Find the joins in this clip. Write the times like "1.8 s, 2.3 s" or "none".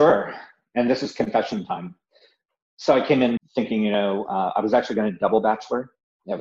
3.4 s